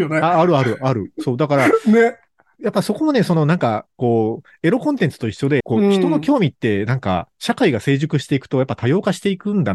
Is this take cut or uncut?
cut